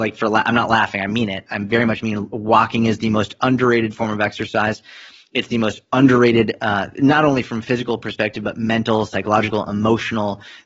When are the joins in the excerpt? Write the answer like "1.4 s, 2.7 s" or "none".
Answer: none